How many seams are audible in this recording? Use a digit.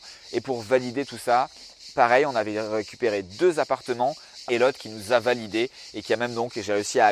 1